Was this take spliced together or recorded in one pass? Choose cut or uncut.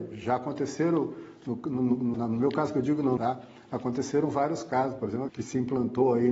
cut